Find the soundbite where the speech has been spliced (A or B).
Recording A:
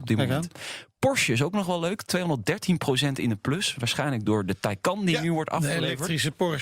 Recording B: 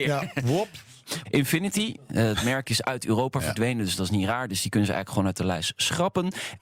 B